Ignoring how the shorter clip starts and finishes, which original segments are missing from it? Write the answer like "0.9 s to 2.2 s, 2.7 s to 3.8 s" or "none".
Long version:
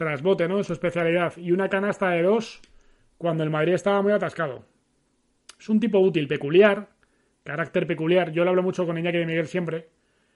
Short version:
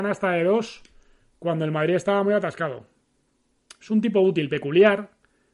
none